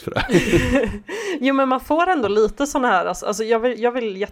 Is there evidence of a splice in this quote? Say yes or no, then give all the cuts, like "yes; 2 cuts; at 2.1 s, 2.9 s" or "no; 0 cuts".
no; 0 cuts